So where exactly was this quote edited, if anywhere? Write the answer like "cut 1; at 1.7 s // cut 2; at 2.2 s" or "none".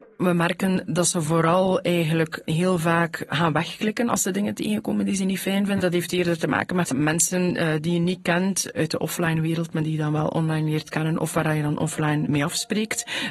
cut 1; at 5.8 s